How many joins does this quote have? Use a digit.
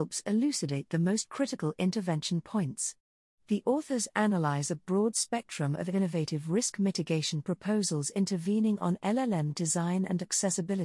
1